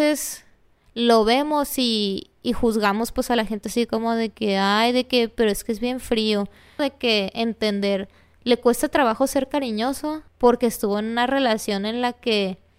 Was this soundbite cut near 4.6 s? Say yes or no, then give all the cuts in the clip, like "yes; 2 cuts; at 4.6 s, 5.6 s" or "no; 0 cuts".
no; 2 cuts; at 6.8 s, 10.3 s